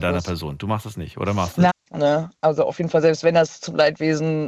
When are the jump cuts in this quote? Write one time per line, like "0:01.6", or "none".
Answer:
0:01.7